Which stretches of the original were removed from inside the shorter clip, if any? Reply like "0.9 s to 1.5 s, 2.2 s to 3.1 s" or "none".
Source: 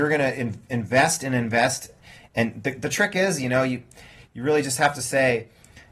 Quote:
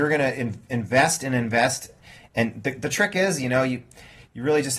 none